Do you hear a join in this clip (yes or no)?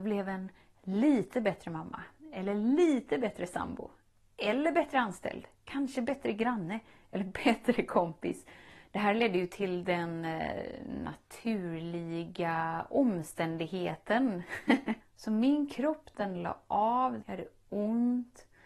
yes